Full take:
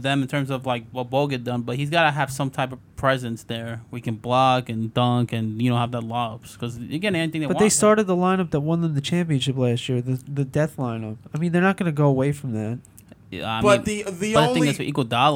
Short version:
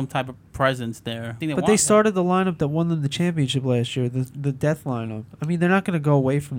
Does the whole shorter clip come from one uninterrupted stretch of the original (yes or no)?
no